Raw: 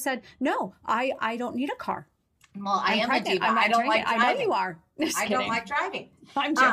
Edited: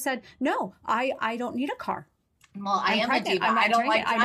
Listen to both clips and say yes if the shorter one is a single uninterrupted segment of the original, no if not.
yes